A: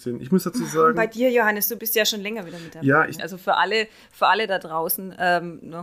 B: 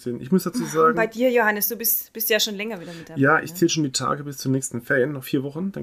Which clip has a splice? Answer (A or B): A